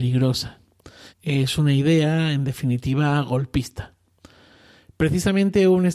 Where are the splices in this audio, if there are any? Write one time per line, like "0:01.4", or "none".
0:01.1